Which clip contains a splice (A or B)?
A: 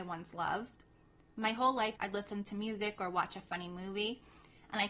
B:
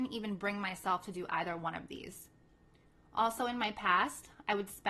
A